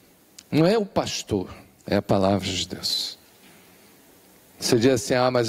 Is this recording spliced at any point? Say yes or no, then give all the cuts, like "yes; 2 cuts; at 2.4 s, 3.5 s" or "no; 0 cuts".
yes; 1 cut; at 1.8 s